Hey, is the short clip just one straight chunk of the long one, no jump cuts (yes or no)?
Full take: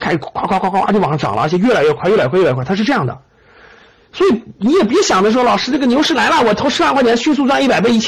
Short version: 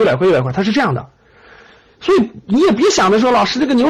yes